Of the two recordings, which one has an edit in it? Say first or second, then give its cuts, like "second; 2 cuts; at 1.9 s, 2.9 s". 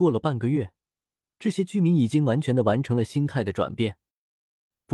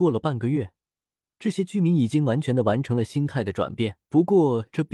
second; 1 cut; at 4.0 s